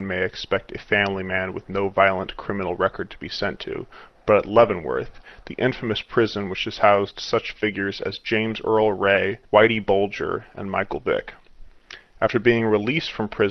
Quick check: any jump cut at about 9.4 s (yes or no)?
yes